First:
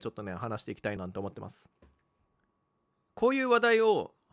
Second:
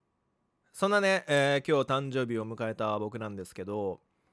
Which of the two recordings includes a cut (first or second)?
first